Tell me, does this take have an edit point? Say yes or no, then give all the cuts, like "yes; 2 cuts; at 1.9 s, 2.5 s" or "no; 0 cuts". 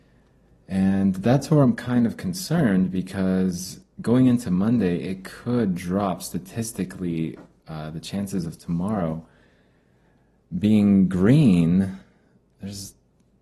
no; 0 cuts